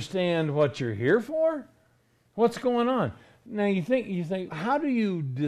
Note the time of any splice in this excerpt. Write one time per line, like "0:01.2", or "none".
0:04.5